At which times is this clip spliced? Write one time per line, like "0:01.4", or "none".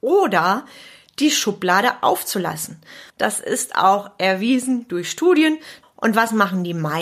0:03.1
0:05.8